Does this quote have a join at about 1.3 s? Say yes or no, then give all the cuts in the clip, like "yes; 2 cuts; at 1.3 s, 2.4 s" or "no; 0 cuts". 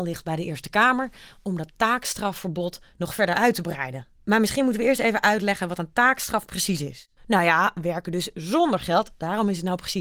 no; 2 cuts; at 4.2 s, 7.2 s